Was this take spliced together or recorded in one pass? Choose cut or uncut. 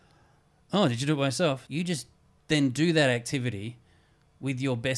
cut